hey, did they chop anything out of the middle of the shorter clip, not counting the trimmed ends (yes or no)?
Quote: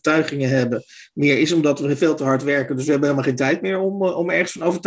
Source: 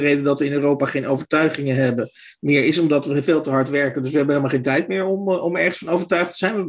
no